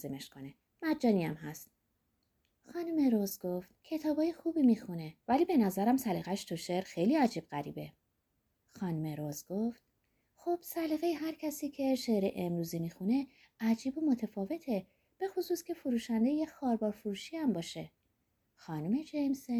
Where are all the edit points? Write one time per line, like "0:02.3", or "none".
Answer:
0:03.8
0:05.2